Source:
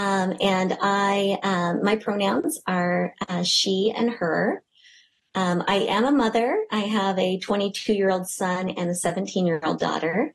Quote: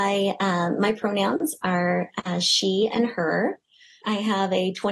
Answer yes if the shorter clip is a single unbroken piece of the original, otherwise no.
no